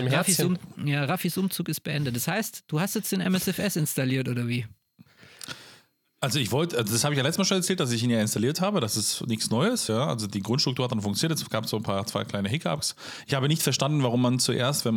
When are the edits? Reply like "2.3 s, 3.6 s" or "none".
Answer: none